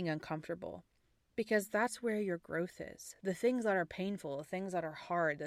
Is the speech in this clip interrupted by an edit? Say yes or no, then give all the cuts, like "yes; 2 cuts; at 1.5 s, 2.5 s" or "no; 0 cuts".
no; 0 cuts